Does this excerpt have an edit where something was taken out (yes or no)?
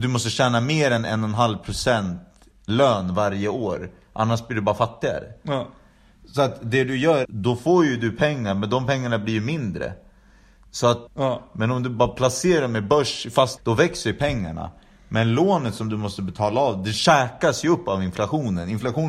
yes